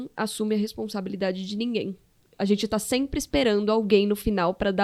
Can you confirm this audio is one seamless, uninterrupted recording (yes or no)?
yes